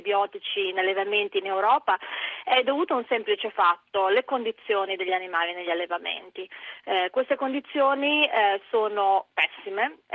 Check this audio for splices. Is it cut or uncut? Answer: uncut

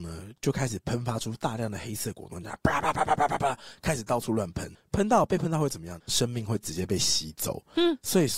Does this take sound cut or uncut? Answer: cut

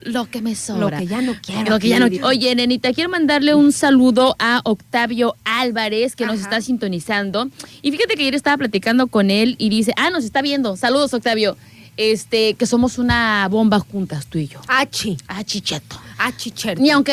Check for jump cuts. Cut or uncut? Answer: cut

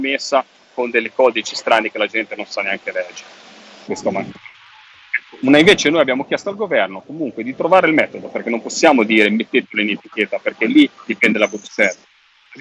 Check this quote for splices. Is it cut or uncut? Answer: cut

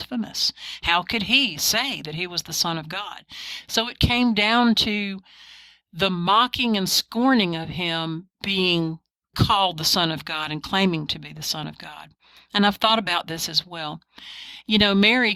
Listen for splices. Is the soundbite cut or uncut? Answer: uncut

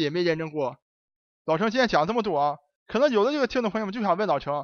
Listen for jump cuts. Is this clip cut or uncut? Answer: uncut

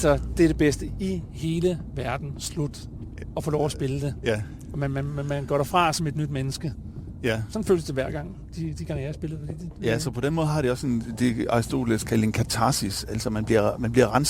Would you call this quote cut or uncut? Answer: uncut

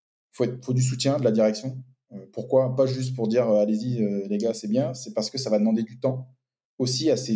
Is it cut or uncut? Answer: uncut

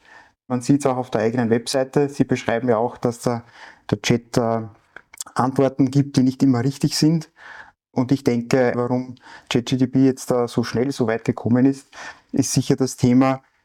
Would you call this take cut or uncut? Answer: cut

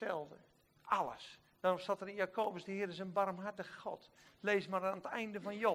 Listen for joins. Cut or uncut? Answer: uncut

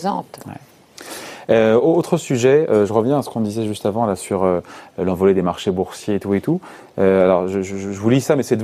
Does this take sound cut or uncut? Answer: uncut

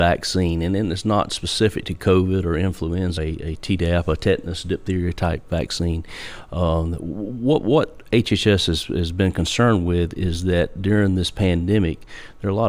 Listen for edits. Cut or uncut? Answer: cut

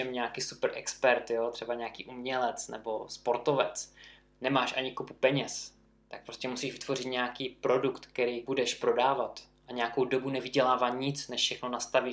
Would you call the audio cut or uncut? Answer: cut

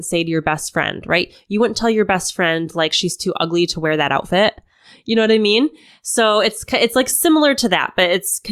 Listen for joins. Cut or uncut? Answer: uncut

